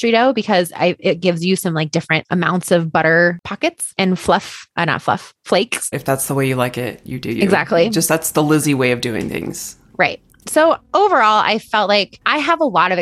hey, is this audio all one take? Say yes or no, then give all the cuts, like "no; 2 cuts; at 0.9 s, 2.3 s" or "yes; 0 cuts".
no; 1 cut; at 5.9 s